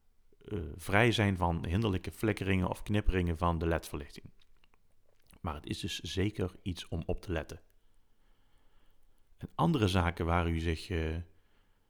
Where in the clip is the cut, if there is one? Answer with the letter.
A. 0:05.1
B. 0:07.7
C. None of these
C